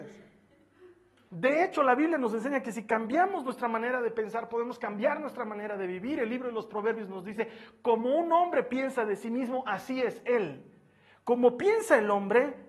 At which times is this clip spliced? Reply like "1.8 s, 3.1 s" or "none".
1.3 s